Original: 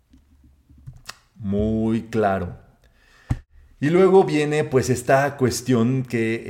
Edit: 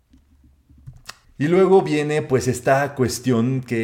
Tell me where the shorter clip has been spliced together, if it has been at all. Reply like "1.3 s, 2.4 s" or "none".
1.2 s